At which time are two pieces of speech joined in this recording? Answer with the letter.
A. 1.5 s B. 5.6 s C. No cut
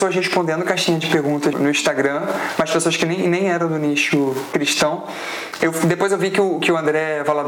A